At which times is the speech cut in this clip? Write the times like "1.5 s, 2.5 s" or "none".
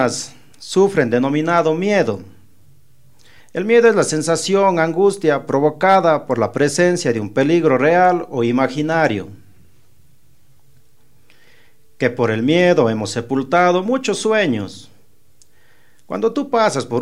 3.4 s